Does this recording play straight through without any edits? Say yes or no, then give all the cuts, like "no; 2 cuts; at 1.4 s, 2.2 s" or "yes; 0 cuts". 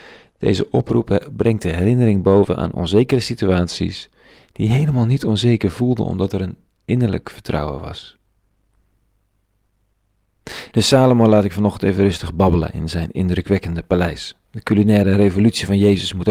no; 1 cut; at 10.7 s